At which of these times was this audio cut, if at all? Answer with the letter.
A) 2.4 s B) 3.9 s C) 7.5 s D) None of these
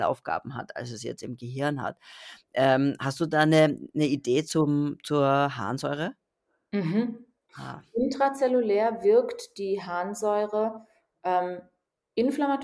C